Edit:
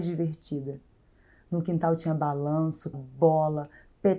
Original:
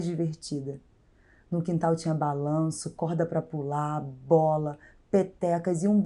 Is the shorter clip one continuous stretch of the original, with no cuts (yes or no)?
no